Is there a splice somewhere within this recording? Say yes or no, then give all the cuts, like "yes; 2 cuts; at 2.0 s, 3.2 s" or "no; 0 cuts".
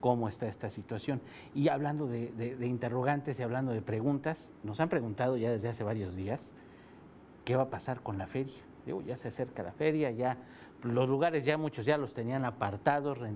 no; 0 cuts